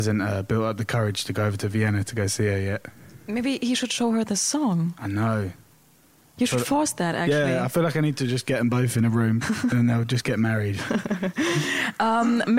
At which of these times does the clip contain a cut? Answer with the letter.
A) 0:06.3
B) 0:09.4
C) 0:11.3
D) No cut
B